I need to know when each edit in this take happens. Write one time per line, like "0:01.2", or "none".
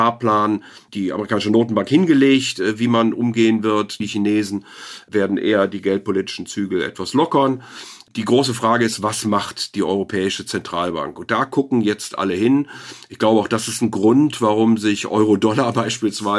0:04.0